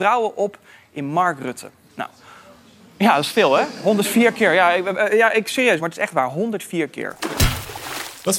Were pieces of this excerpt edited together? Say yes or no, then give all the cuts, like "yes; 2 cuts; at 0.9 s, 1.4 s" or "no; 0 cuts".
yes; 1 cut; at 5.8 s